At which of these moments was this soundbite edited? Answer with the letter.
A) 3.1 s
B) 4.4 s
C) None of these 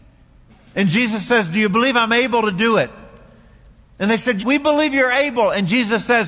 B